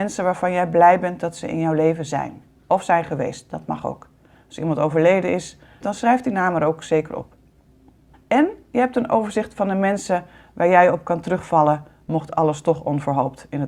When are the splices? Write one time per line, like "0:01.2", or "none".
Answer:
0:05.8
0:08.1

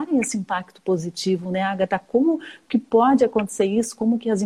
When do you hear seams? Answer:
none

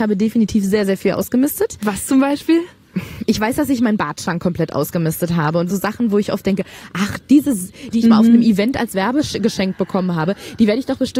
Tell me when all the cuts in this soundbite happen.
0:05.7
0:07.9

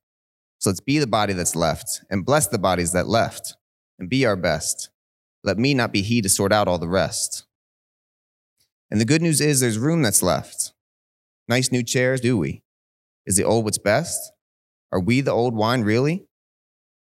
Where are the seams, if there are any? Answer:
0:12.2

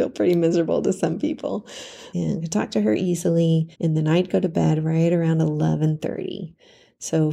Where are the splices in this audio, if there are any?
0:02.1
0:03.7

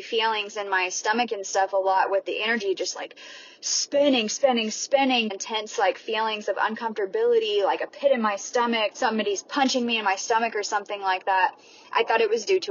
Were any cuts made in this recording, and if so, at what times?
0:05.3
0:08.9

